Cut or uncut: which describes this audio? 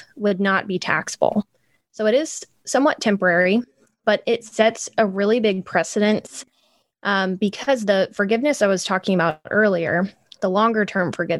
uncut